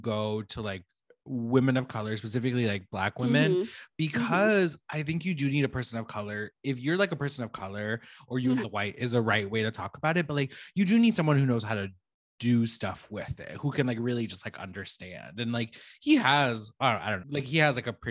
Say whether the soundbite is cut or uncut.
cut